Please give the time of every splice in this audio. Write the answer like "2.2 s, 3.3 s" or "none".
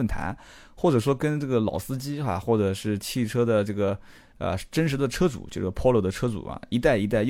none